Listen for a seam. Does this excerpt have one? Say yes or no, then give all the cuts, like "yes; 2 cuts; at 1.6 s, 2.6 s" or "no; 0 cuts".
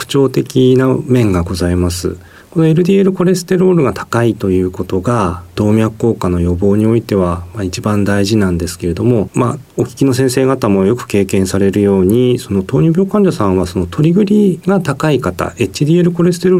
no; 0 cuts